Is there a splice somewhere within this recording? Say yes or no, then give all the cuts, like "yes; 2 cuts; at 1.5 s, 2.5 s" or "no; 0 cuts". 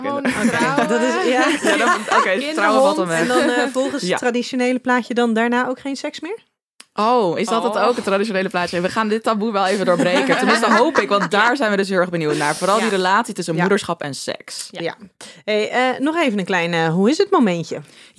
no; 0 cuts